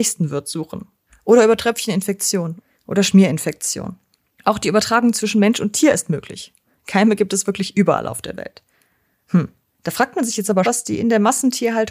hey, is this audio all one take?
no; 2 cuts; at 9.2 s, 10.6 s

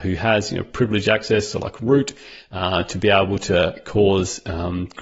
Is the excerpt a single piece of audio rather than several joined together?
yes; 0 cuts

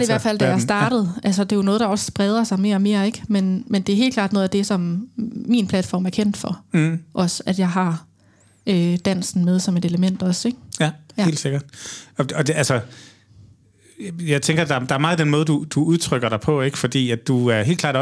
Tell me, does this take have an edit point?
no; 0 cuts

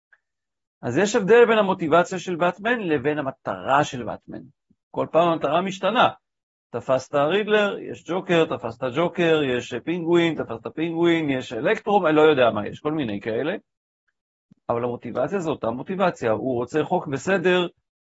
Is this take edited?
no; 0 cuts

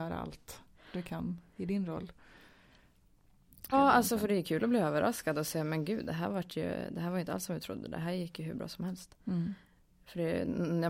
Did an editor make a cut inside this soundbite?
yes; 1 cut; at 3.7 s

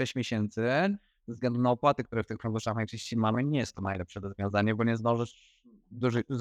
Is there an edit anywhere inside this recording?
no; 0 cuts

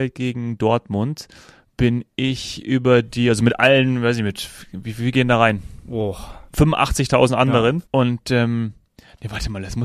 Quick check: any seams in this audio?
yes; 2 cuts; at 6.5 s, 7.9 s

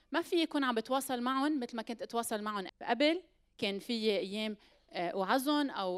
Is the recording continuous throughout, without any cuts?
no; 1 cut; at 2.7 s

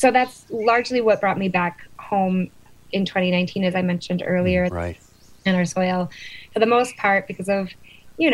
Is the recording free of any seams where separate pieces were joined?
no; 1 cut; at 4.7 s

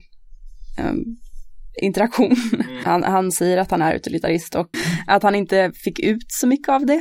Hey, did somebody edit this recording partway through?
yes; 2 cuts; at 2.8 s, 4.7 s

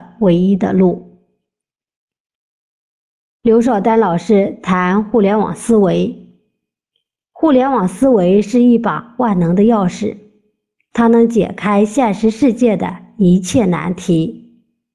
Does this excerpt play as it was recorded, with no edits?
yes; 0 cuts

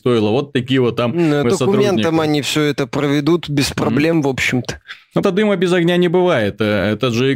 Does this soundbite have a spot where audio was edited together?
yes; 2 cuts; at 1.4 s, 5.2 s

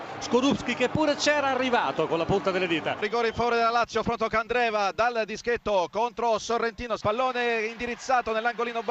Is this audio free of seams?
no; 3 cuts; at 3.0 s, 4.0 s, 7.0 s

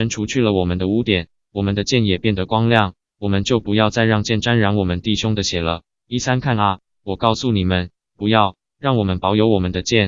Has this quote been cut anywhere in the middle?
no; 0 cuts

